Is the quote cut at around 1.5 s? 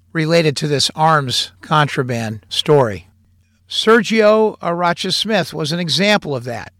no; 1 cut; at 3.6 s

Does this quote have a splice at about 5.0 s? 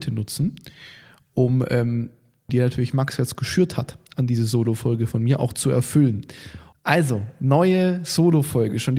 no; 2 cuts; at 2.5 s, 6.7 s

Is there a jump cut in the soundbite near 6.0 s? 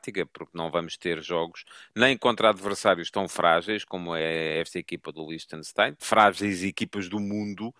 yes; 1 cut; at 6.0 s

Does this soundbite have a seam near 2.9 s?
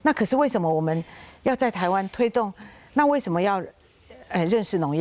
yes; 1 cut; at 2.9 s

